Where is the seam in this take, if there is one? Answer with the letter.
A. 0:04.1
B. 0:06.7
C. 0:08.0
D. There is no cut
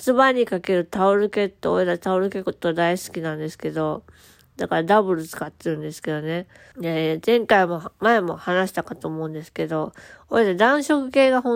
B